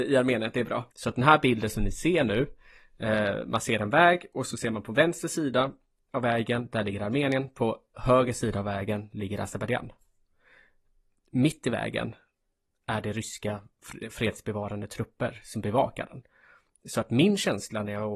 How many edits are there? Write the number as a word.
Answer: one